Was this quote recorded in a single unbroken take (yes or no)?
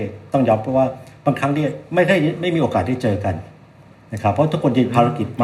yes